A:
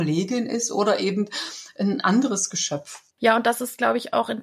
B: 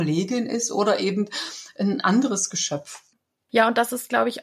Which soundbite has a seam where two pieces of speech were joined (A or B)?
A